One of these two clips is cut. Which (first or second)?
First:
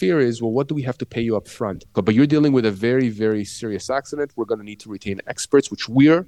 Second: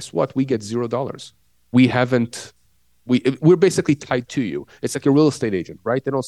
first